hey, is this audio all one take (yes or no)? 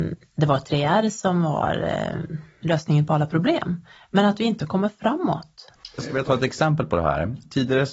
no